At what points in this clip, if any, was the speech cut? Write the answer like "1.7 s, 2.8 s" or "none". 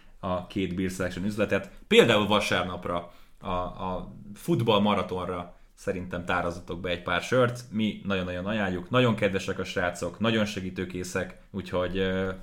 11.5 s